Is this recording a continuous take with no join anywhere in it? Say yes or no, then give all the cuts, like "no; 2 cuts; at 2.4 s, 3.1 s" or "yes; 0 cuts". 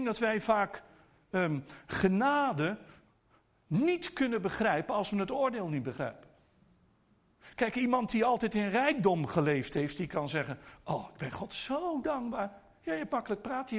yes; 0 cuts